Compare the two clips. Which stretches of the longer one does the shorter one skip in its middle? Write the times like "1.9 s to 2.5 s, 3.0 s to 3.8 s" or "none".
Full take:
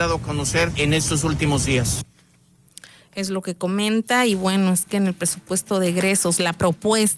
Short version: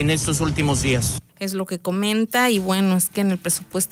2.1 s to 3.1 s